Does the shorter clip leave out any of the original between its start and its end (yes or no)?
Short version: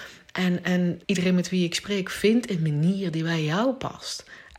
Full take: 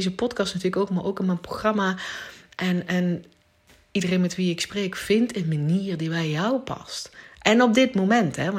yes